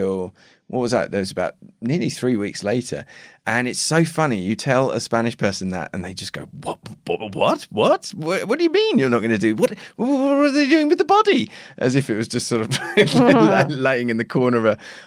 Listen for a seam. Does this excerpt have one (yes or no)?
no